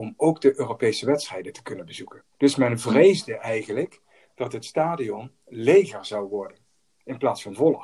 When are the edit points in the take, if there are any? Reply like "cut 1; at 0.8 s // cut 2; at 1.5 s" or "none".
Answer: cut 1; at 2.3 s